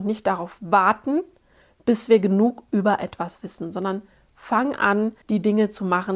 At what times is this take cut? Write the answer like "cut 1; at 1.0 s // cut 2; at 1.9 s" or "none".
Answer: cut 1; at 5.2 s